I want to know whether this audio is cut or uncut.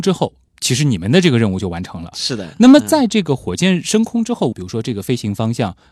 cut